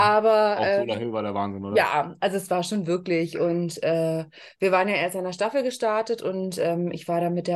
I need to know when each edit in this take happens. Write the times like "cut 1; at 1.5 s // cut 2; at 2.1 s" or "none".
none